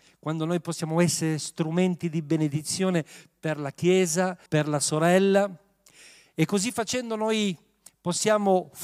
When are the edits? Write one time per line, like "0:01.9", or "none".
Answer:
0:04.5